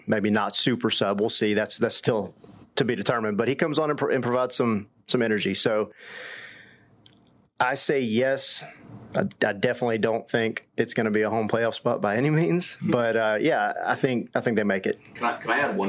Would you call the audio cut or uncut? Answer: uncut